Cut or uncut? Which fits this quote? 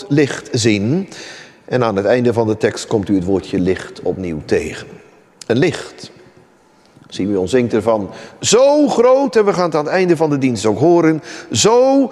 uncut